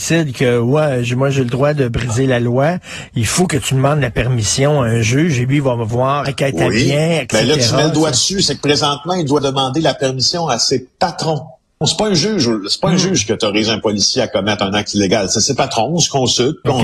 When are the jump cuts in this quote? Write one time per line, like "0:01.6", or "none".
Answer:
0:06.3
0:11.8